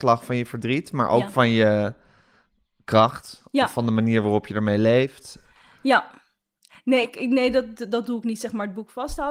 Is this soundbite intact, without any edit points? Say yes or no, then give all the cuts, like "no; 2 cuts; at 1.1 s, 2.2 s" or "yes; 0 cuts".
yes; 0 cuts